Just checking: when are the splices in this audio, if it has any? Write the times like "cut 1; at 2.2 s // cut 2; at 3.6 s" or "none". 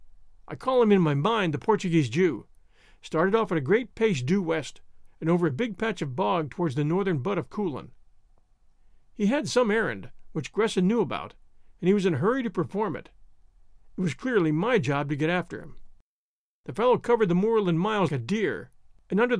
cut 1; at 5.1 s // cut 2; at 16.6 s // cut 3; at 18.1 s